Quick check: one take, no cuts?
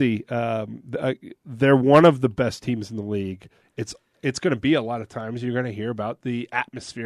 no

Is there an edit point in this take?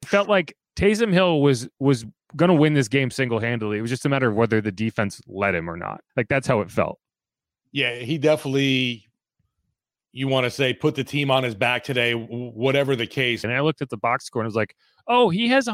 yes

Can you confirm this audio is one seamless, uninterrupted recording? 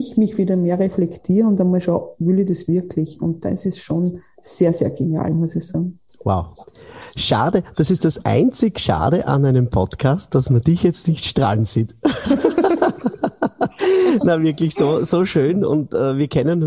yes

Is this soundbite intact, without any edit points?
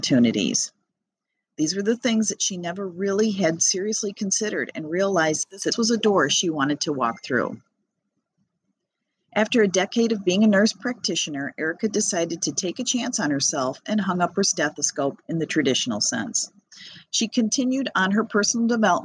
yes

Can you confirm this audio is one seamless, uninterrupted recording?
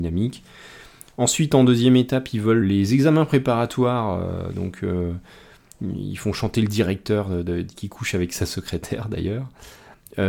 no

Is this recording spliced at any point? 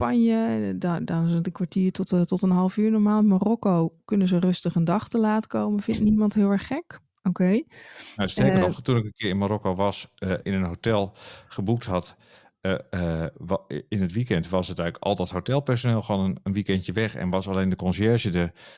yes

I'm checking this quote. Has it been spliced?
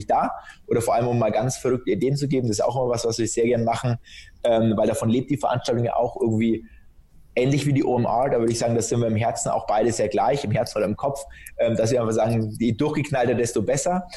no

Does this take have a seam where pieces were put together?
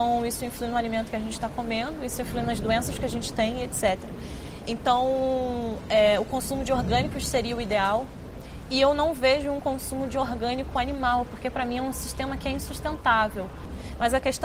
no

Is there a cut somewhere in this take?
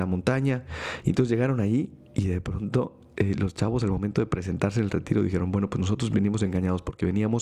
yes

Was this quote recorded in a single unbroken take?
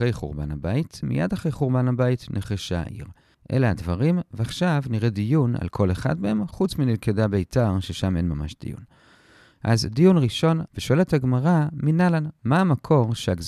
no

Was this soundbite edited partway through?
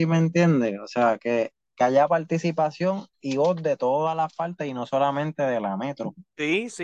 no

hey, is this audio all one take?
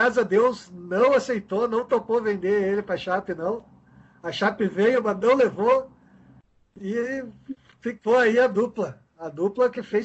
yes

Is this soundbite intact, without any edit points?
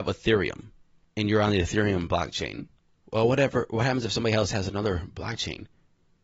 yes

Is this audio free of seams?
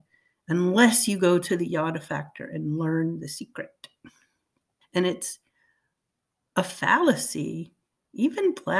no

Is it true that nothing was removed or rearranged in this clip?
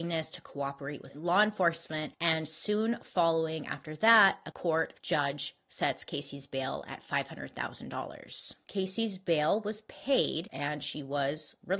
no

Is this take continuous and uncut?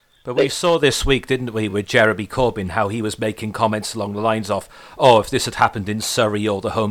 yes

